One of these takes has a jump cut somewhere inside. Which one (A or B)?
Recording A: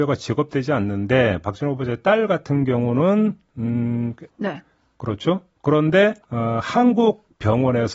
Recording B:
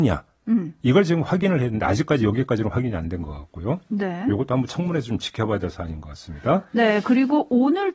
A